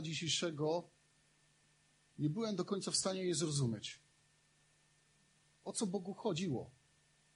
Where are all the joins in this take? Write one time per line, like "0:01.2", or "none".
none